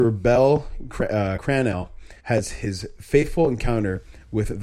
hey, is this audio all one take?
no; 1 cut; at 2.2 s

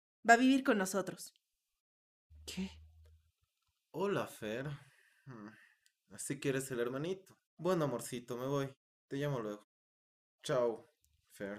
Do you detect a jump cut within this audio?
yes; 1 cut; at 7.5 s

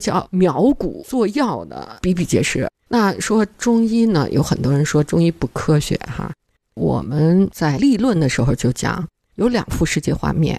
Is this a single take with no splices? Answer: no; 1 cut; at 2.8 s

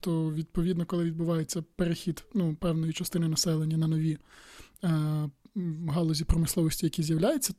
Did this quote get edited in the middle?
no; 0 cuts

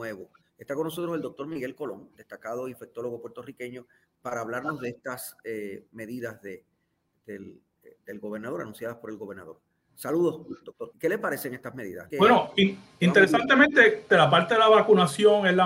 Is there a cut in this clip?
yes; 3 cuts; at 10.9 s, 12.1 s, 14.1 s

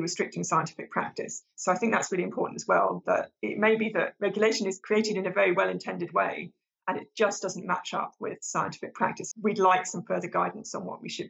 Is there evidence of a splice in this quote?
yes; 1 cut; at 9.3 s

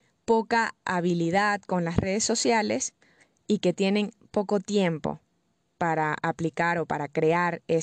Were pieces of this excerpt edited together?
no; 0 cuts

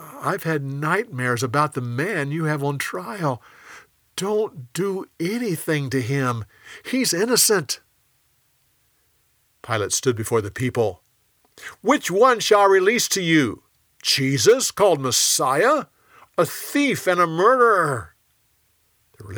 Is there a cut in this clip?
yes; 1 cut; at 16.3 s

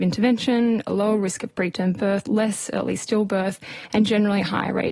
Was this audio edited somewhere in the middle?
no; 0 cuts

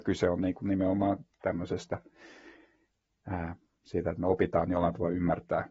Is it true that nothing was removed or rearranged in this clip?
yes; 0 cuts

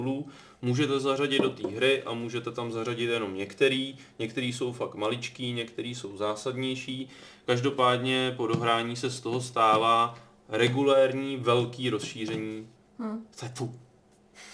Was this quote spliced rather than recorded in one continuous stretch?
no; 0 cuts

